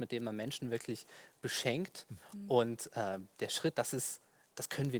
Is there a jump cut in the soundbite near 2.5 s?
no; 1 cut; at 3.7 s

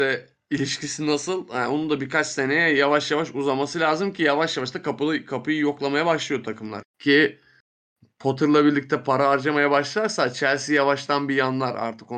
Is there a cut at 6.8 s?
yes; 1 cut; at 6.8 s

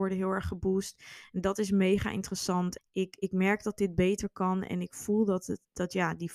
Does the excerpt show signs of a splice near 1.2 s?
no; 1 cut; at 2.8 s

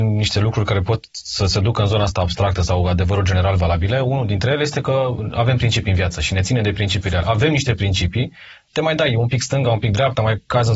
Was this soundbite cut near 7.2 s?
yes; 2 cuts; at 7.2 s, 8.7 s

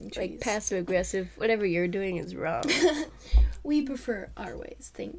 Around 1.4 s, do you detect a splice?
no; 0 cuts

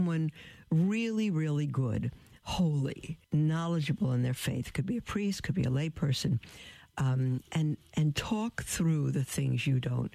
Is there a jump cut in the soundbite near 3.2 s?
yes; 1 cut; at 3.2 s

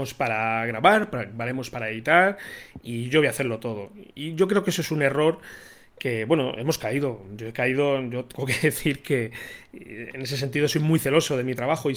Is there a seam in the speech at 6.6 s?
no; 0 cuts

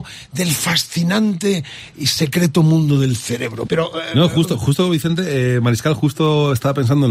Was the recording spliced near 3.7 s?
yes; 1 cut; at 3.7 s

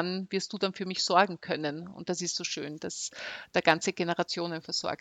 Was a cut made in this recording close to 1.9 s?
no; 0 cuts

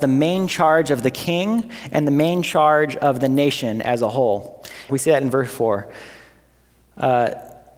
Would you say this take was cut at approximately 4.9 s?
yes; 1 cut; at 4.9 s

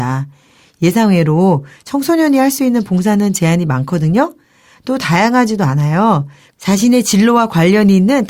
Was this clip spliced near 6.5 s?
yes; 1 cut; at 6.5 s

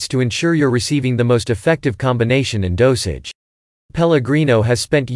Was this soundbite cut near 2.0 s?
no; 1 cut; at 3.9 s

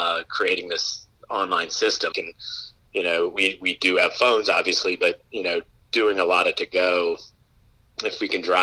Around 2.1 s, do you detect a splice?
yes; 1 cut; at 2.1 s

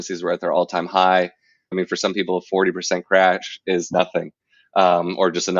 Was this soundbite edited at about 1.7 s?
yes; 1 cut; at 1.7 s

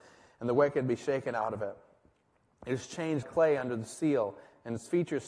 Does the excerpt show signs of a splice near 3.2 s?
yes; 1 cut; at 3.2 s

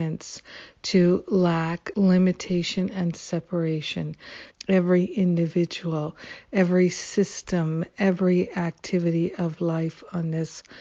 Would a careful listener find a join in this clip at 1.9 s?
yes; 2 cuts; at 1.9 s, 4.5 s

